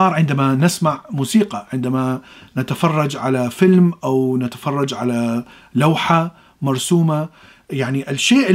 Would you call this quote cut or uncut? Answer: uncut